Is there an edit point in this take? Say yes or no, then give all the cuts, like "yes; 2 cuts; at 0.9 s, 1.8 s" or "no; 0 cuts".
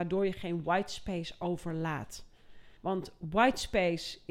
yes; 1 cut; at 2.8 s